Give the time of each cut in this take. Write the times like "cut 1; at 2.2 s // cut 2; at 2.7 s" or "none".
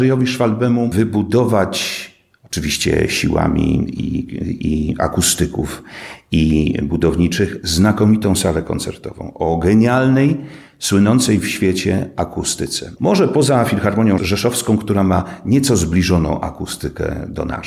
cut 1; at 13.0 s